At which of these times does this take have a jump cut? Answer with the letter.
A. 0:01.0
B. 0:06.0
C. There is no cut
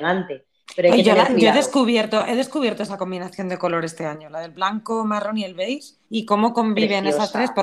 B